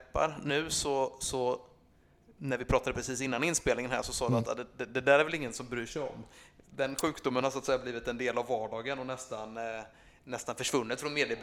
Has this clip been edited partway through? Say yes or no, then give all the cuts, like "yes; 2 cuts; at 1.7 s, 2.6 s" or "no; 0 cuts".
no; 0 cuts